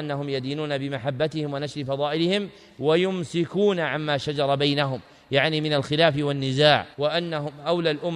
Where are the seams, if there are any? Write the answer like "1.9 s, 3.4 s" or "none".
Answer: 6.9 s